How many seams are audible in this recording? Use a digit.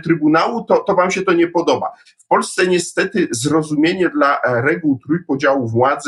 1